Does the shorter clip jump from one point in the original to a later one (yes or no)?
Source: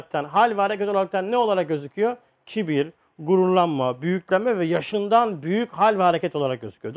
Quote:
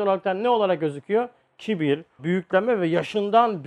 yes